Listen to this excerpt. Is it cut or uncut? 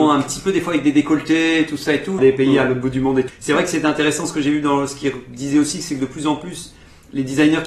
cut